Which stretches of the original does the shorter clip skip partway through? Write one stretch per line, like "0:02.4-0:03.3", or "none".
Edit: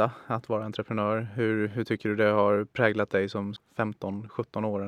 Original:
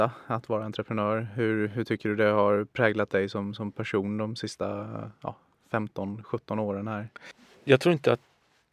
0:03.6-0:05.5